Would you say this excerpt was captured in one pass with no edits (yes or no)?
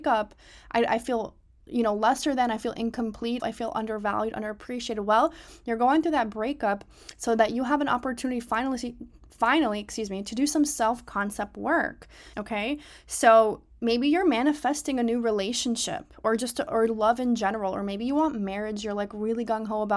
no